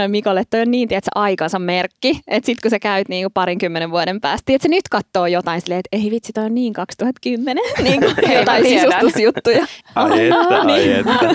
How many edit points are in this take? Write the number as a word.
one